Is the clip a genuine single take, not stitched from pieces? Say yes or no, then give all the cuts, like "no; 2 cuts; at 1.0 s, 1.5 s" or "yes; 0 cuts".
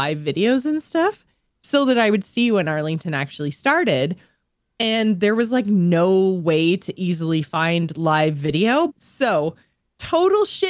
no; 1 cut; at 8.9 s